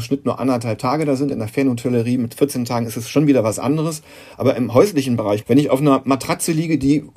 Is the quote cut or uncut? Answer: cut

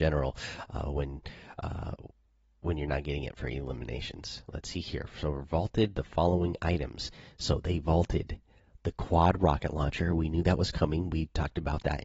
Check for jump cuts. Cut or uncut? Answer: uncut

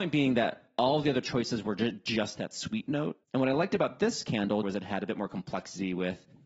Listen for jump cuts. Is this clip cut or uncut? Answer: cut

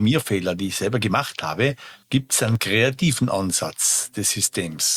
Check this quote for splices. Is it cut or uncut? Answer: cut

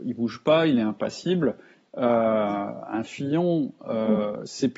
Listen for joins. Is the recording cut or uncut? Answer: cut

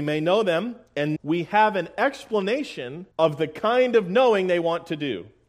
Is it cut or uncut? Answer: cut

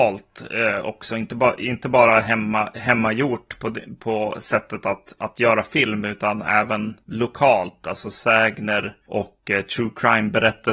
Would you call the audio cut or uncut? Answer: uncut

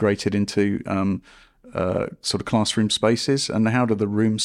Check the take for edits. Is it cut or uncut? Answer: uncut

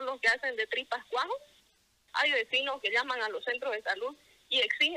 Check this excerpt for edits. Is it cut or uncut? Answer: cut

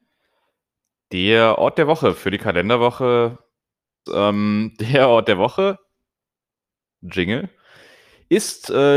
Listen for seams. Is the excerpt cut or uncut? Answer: cut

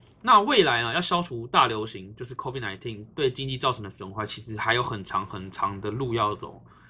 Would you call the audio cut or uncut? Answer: uncut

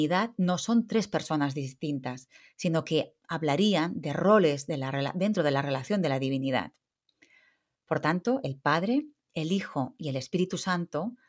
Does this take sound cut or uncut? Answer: uncut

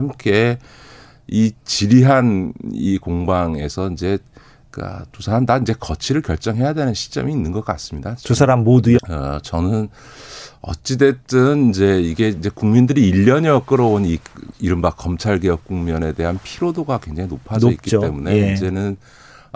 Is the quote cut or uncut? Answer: cut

